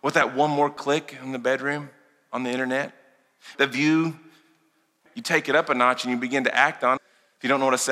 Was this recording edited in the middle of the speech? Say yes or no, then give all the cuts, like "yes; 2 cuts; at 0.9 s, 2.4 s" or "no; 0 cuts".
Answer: yes; 3 cuts; at 3.5 s, 5.1 s, 7.0 s